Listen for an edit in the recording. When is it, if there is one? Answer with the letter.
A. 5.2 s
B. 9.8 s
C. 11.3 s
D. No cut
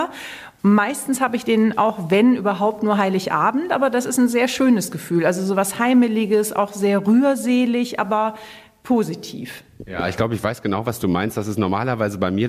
D